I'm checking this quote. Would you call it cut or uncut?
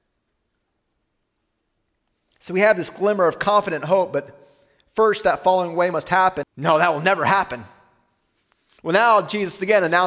cut